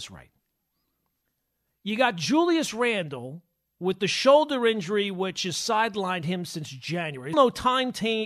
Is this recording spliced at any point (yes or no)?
yes